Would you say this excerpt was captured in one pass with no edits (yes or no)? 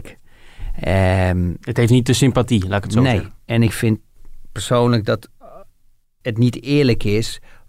yes